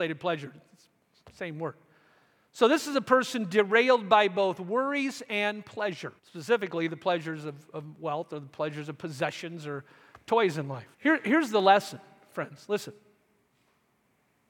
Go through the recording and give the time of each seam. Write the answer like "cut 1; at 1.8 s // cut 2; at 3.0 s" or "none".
cut 1; at 6.2 s // cut 2; at 10.9 s